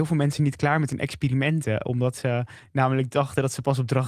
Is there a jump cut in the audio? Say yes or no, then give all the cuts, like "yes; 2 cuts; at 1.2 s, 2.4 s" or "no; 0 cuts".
no; 0 cuts